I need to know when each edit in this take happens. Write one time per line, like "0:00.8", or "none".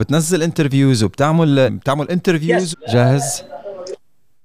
0:01.7
0:02.7